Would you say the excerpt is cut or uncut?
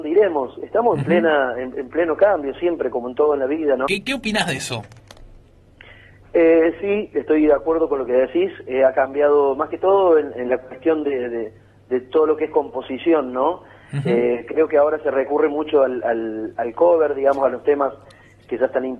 cut